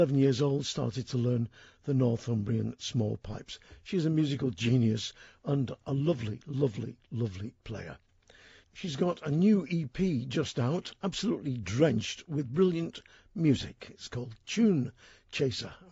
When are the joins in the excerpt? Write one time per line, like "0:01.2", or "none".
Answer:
none